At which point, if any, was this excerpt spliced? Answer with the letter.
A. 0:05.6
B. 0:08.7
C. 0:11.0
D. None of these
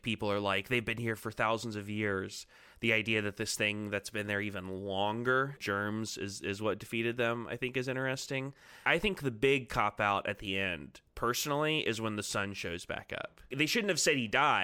A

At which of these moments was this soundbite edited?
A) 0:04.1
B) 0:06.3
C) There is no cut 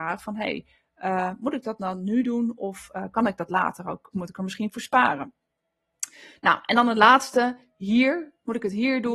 A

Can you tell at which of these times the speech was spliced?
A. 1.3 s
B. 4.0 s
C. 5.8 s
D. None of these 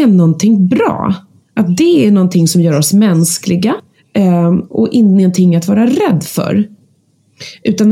D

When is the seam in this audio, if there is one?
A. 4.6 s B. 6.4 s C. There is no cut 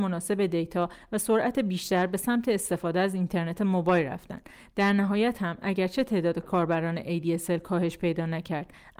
C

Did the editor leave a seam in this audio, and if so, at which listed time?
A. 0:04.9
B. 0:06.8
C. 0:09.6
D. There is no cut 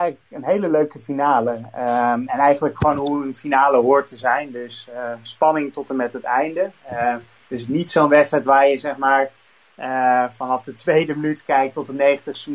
D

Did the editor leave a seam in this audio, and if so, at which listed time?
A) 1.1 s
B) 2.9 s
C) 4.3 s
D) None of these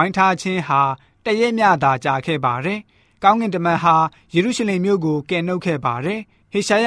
D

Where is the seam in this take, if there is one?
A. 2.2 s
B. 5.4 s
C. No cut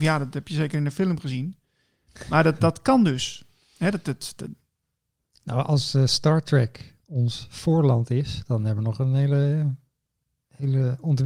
C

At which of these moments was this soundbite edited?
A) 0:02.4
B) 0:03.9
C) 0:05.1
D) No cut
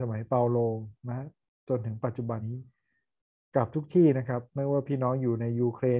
A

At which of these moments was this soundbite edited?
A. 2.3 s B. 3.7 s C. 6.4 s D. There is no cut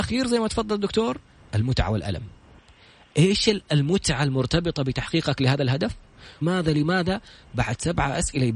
C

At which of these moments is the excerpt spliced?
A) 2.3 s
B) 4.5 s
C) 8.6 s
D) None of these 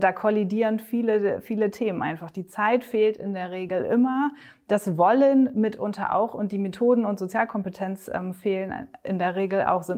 D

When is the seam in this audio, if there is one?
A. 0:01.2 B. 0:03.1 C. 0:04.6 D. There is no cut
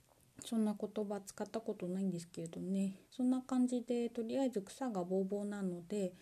B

